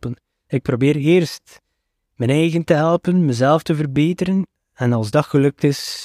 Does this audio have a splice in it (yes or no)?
no